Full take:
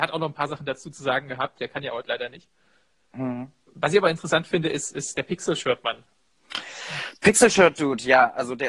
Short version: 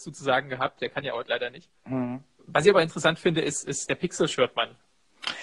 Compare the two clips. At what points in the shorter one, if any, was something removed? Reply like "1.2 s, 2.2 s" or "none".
1.8 s